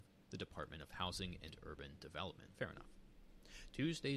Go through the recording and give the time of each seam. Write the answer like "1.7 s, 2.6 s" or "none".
2.5 s